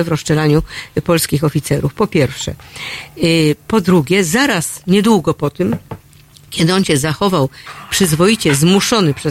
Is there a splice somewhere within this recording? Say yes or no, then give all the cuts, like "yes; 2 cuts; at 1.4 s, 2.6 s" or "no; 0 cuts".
no; 0 cuts